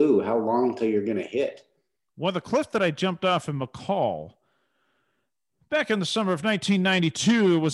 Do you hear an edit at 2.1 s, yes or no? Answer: yes